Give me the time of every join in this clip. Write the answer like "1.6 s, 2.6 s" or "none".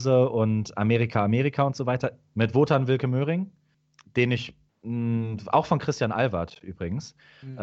2.3 s